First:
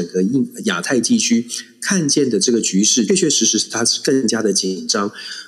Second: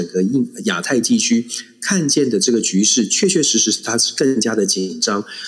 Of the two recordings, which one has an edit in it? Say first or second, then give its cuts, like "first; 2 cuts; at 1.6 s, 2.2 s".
first; 1 cut; at 3.1 s